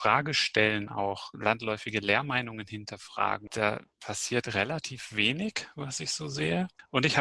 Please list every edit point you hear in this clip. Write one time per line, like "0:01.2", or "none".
none